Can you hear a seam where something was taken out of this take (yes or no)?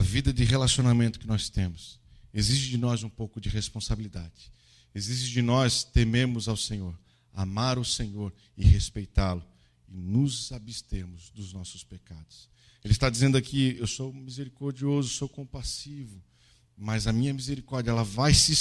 yes